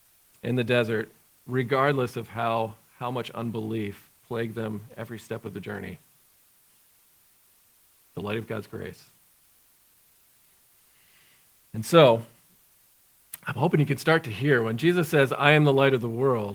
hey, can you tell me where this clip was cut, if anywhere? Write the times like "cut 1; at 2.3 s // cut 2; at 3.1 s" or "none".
none